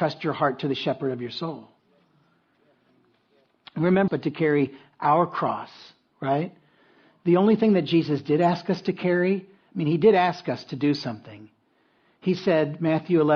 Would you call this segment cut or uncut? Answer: cut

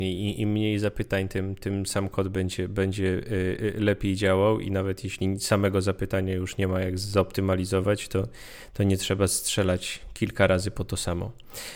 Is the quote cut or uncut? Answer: uncut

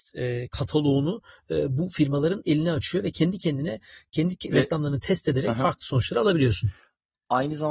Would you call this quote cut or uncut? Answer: uncut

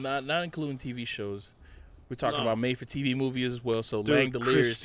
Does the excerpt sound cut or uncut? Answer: uncut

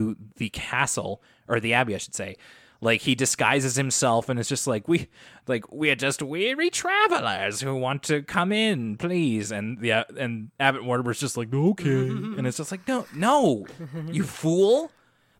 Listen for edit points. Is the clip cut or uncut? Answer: uncut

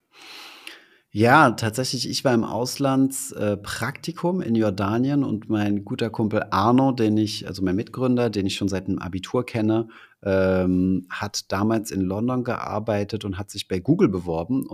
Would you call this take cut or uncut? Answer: uncut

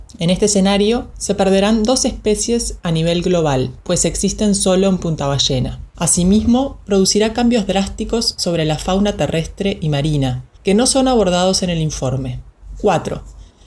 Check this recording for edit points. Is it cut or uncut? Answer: uncut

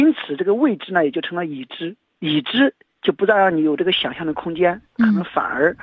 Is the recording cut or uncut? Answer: uncut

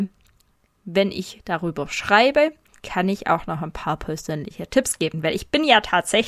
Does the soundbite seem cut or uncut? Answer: uncut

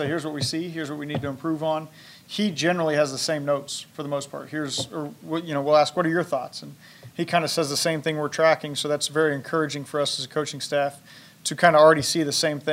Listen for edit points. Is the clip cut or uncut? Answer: uncut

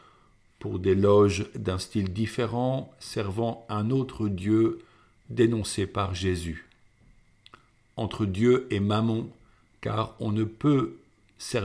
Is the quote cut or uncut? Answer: cut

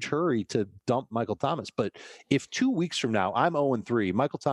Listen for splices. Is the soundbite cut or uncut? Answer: uncut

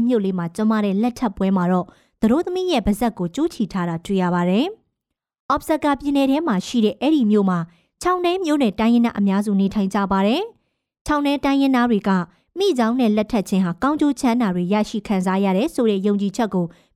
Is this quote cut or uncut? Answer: uncut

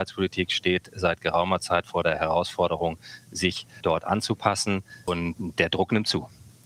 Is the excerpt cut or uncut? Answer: uncut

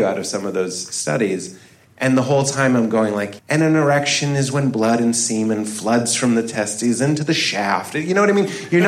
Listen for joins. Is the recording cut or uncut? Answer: cut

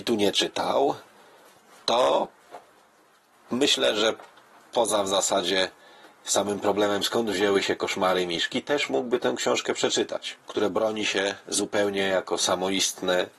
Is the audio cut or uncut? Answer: cut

